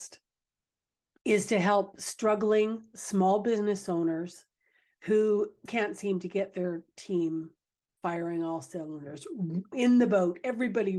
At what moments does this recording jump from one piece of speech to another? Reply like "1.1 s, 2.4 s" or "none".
5.7 s, 9.7 s